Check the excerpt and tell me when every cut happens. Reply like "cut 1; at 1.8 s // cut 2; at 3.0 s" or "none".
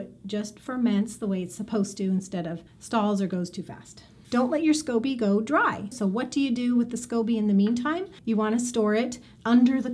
cut 1; at 2.7 s // cut 2; at 5.9 s